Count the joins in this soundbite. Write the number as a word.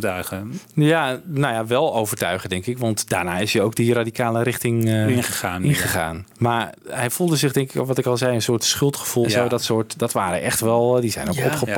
two